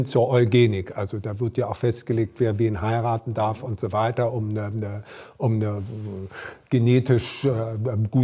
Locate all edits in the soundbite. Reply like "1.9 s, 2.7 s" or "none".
none